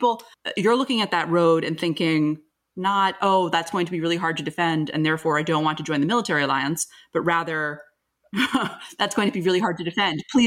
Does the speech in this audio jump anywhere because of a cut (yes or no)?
no